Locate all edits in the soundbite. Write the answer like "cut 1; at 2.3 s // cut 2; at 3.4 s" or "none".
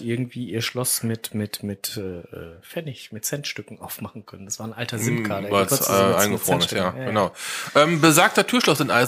none